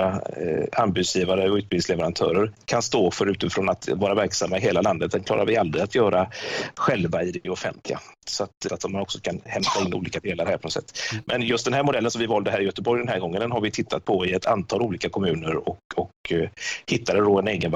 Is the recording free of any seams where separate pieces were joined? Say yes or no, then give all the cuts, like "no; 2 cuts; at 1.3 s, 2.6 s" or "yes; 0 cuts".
no; 1 cut; at 8.7 s